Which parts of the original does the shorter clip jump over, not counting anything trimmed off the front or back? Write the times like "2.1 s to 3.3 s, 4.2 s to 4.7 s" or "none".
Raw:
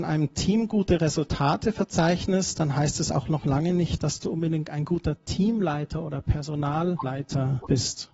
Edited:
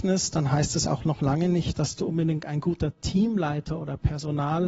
none